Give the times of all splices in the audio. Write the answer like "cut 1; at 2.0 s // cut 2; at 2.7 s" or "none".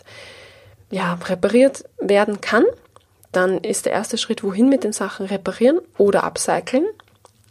none